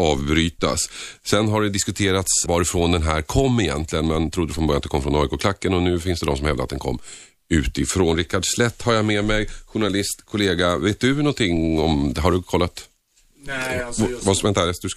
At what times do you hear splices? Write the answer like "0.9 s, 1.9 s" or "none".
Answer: 2.5 s